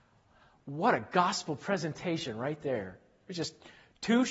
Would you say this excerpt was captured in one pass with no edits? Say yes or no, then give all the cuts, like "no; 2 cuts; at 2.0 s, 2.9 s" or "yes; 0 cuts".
yes; 0 cuts